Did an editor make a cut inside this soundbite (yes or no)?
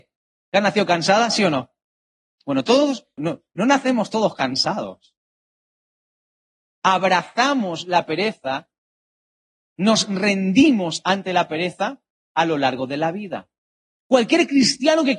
yes